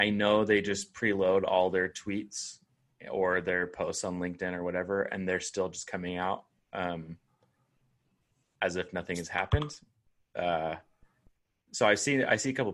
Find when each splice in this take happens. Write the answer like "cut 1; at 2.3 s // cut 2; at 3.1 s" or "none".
none